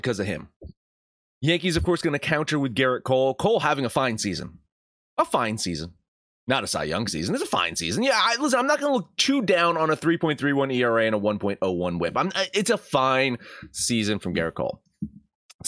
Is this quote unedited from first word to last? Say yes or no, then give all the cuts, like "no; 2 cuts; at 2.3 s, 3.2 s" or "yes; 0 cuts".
yes; 0 cuts